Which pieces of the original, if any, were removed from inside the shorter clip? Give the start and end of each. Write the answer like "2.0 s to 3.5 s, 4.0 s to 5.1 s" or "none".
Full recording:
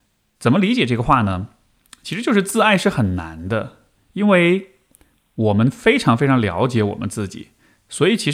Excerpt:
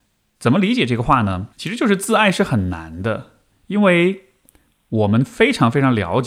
1.5 s to 2.0 s